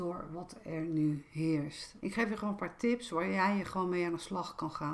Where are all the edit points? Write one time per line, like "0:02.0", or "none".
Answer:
0:02.0